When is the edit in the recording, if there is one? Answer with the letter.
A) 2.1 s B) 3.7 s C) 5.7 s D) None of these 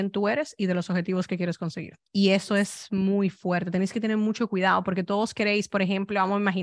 A